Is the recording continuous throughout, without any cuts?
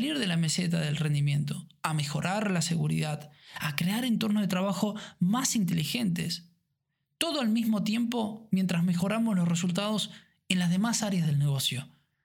yes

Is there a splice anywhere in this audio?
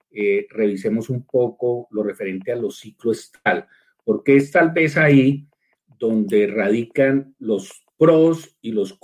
no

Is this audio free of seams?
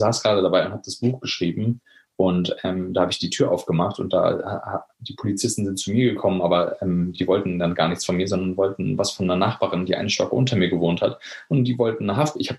yes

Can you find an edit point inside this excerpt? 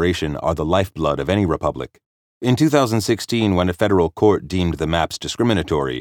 yes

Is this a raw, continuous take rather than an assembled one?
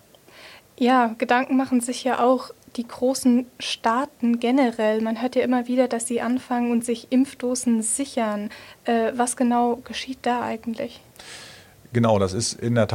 yes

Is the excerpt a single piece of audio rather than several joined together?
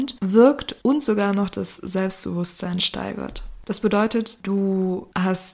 no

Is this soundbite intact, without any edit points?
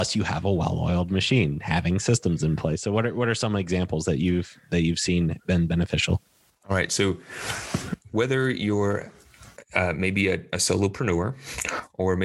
yes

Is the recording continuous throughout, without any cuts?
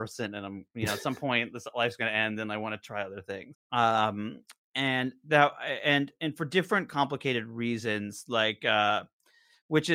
no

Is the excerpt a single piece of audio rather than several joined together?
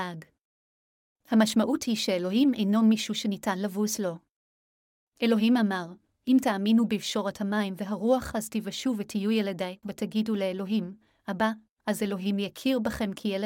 no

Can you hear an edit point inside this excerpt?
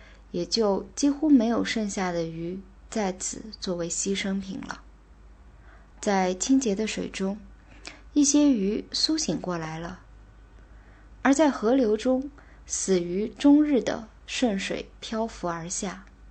yes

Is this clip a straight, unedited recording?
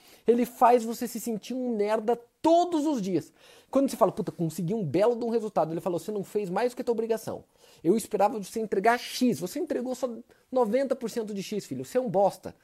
yes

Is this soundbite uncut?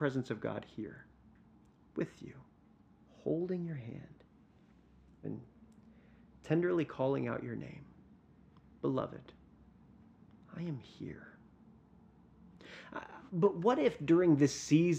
no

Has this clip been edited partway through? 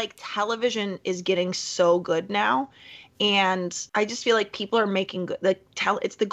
yes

